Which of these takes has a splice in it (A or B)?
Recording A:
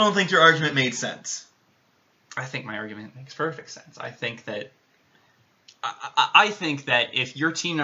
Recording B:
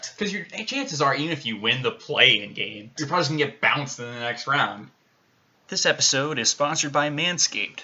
B